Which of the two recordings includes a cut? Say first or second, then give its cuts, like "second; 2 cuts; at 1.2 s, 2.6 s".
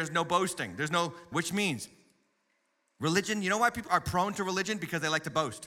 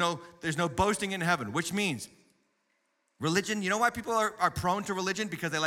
first; 2 cuts; at 1.3 s, 3.9 s